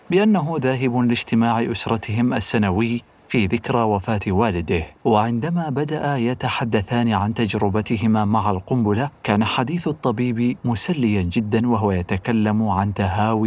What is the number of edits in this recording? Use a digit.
2